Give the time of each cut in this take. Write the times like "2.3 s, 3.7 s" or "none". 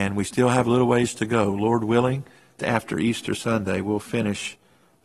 2.6 s